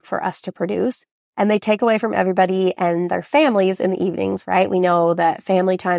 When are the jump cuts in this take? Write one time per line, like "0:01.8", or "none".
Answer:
0:04.4